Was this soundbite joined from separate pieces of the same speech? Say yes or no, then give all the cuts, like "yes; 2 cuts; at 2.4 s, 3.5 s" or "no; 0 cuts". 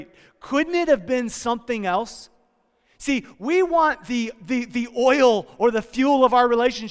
no; 0 cuts